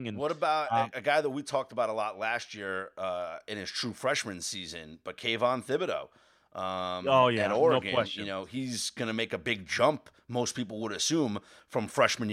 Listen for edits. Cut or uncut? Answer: uncut